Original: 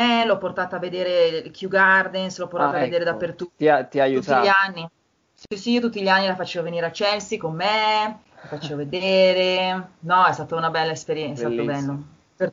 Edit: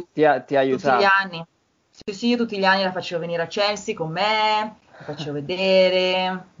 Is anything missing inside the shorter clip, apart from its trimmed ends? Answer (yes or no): no